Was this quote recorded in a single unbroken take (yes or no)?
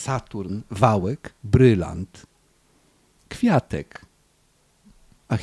yes